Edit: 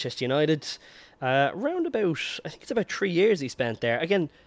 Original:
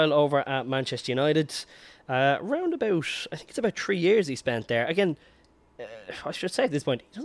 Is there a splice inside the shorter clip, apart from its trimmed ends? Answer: no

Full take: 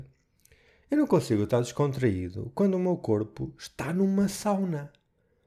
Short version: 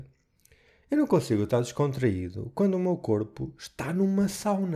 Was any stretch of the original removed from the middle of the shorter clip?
no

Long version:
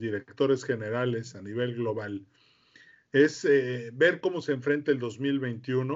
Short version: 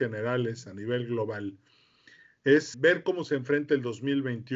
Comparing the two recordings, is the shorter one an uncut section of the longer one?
no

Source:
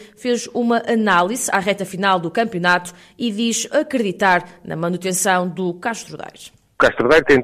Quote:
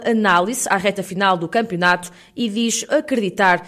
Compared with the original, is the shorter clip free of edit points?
yes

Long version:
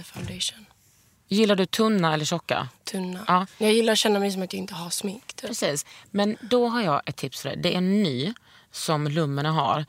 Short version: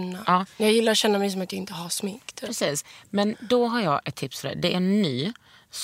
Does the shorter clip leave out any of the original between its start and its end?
no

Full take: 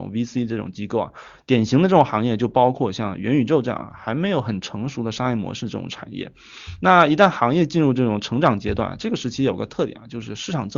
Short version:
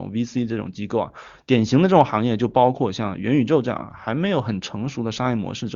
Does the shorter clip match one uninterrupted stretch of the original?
yes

